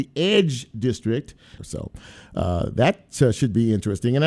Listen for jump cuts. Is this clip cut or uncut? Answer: cut